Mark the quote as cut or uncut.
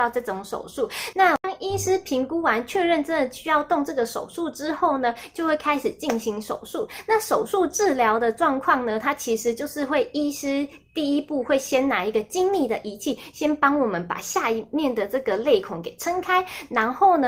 cut